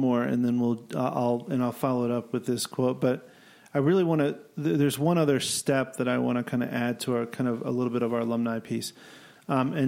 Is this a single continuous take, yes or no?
yes